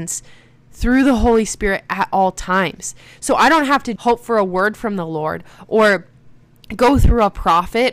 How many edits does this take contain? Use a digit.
1